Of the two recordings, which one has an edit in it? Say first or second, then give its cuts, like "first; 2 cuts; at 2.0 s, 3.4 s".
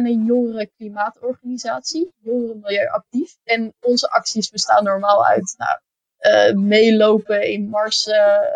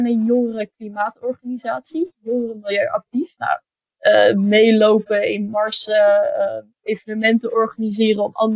second; 1 cut; at 3.4 s